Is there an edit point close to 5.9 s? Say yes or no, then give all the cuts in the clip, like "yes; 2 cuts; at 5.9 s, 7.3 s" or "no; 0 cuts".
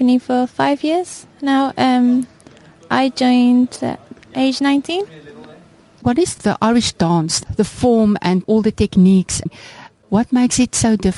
no; 0 cuts